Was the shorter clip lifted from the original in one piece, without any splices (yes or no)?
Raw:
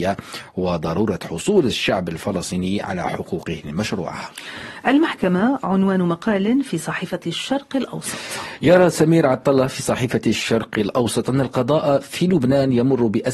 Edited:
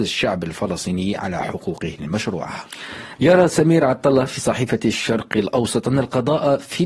no